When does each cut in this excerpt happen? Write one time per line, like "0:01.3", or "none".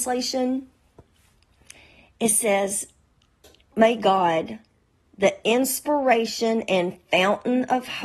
0:03.7